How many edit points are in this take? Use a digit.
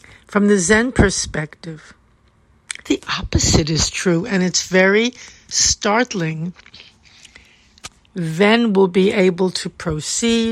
2